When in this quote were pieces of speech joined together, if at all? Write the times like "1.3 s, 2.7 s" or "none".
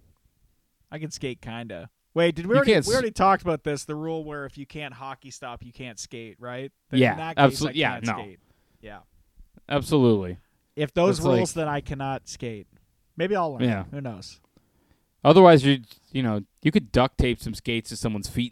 none